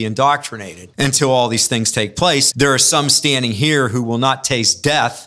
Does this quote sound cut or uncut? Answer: cut